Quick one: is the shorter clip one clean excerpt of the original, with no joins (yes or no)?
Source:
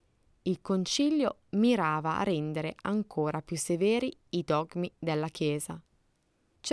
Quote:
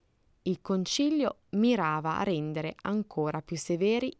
yes